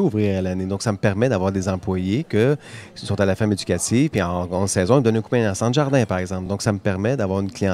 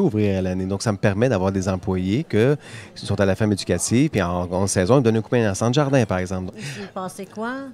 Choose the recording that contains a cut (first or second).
second